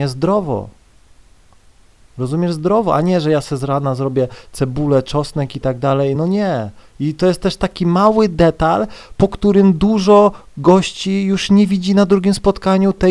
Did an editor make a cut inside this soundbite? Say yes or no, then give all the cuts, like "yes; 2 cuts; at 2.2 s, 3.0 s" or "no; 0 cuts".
no; 0 cuts